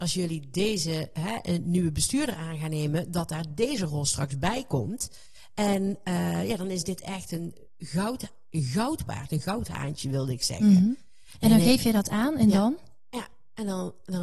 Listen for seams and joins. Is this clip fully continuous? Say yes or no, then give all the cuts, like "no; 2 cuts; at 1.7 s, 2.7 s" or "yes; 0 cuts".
yes; 0 cuts